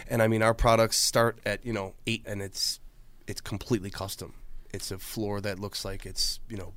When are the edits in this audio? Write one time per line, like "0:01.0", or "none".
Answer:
0:02.2